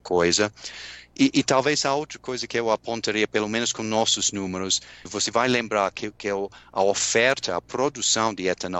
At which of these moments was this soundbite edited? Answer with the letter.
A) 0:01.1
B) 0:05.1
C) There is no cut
B